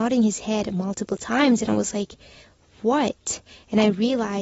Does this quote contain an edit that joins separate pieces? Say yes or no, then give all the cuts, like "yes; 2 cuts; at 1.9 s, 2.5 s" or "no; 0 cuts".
no; 0 cuts